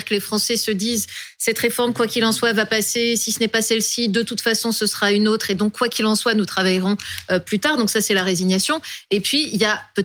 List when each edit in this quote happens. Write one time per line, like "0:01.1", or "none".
none

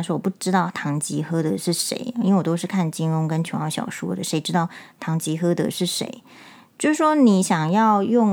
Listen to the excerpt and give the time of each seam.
none

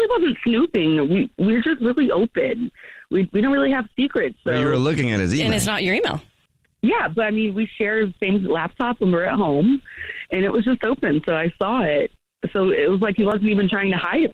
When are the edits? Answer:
none

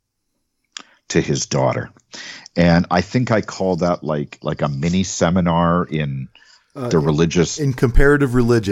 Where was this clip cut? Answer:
0:04.4

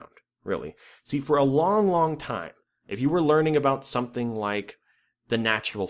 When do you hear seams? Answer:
none

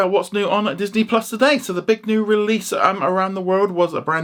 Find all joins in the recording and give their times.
none

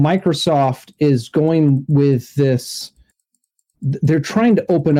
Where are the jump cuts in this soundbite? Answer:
none

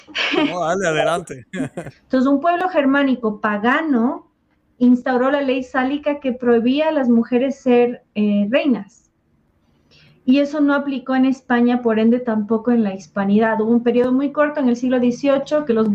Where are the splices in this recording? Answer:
0:01.9

